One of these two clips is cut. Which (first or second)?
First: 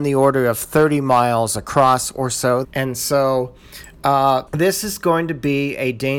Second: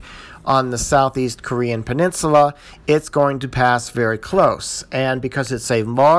first